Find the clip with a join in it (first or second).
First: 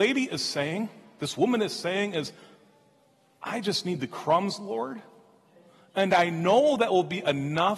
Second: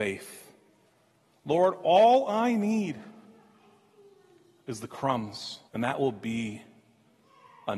second